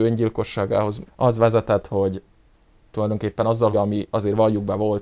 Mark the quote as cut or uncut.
cut